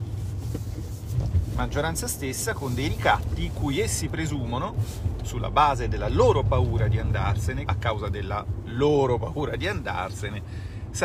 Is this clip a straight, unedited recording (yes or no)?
no